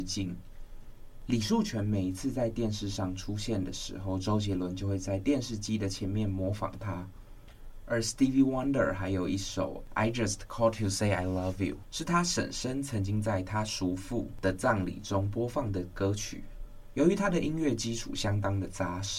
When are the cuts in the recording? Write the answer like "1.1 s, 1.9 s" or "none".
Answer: none